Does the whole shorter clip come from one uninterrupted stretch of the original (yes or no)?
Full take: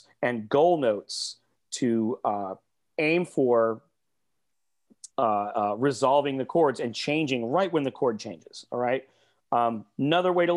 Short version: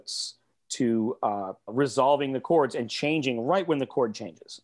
no